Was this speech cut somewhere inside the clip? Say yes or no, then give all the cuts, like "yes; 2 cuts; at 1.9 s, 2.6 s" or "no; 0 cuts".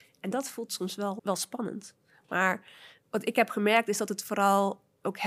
yes; 1 cut; at 1.2 s